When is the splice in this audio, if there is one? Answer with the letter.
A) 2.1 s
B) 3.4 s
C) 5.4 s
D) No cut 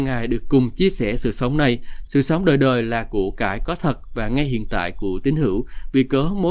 A